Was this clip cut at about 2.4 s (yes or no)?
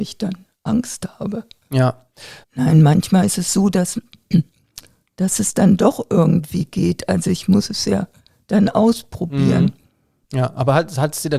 yes